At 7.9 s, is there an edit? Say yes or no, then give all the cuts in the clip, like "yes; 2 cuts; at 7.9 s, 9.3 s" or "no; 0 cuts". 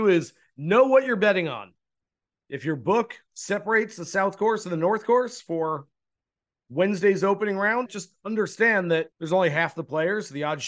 yes; 2 cuts; at 7.9 s, 9.1 s